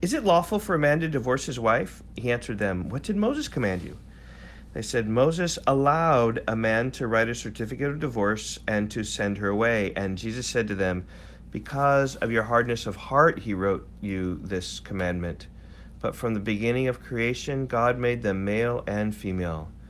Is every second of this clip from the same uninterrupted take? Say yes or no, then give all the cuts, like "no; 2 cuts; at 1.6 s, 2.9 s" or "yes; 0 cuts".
yes; 0 cuts